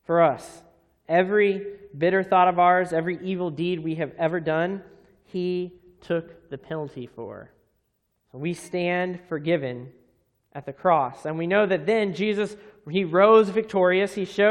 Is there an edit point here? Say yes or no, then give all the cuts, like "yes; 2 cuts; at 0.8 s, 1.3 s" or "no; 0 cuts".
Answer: no; 0 cuts